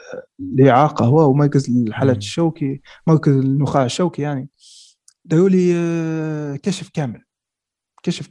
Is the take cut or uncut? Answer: uncut